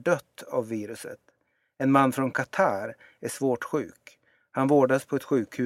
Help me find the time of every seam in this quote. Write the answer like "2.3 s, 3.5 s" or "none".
none